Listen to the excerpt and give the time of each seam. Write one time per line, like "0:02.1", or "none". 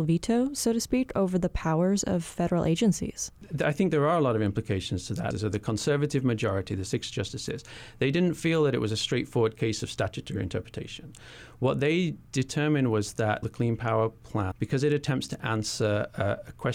0:05.3
0:13.4
0:14.5

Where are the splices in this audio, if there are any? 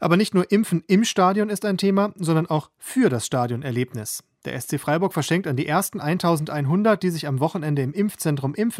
none

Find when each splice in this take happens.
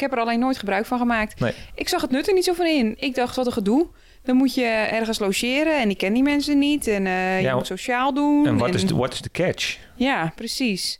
none

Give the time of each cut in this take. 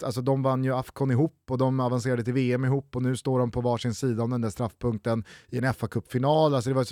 none

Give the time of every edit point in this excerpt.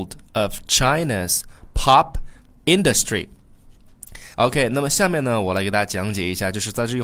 0:04.3

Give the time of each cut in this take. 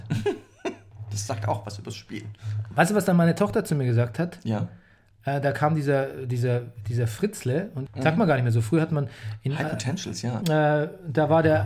0:07.9
0:10.4

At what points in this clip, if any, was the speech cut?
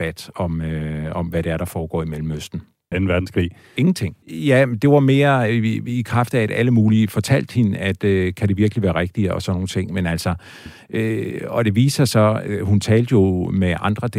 0:02.9
0:04.2

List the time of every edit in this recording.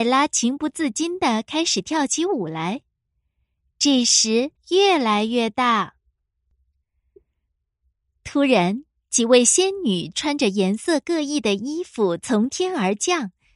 0:04.6

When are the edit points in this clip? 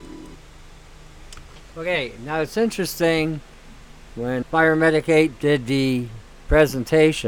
0:04.4

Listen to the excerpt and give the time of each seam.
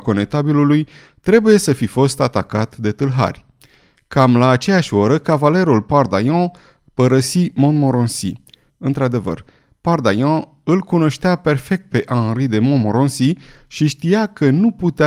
0:08.7

